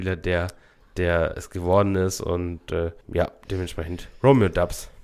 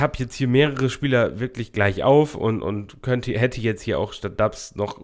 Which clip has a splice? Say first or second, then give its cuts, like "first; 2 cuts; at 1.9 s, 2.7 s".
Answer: first; 2 cuts; at 1.3 s, 3.0 s